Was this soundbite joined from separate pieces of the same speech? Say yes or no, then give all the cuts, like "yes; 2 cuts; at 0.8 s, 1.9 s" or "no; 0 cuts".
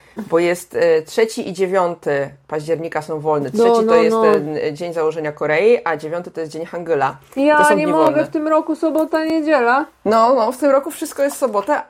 no; 0 cuts